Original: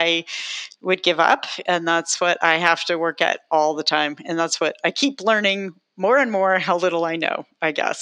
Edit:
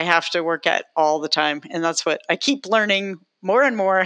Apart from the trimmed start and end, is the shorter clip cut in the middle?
no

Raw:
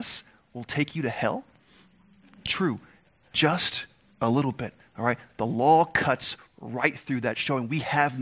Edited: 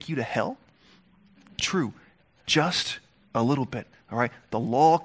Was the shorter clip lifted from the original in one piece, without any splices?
yes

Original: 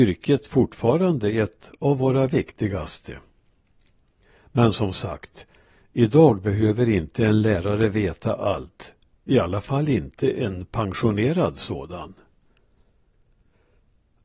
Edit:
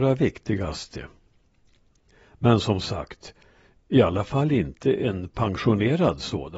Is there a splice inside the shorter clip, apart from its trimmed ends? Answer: yes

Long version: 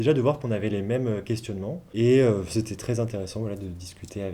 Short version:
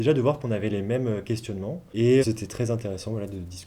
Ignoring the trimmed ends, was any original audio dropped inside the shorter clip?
yes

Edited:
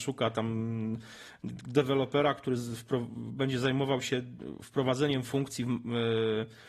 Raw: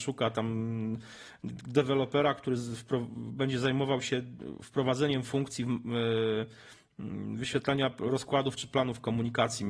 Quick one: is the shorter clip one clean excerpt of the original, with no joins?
yes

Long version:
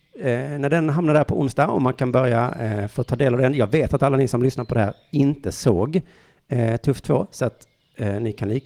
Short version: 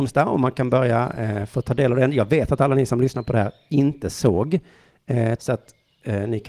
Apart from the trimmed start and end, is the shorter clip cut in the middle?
yes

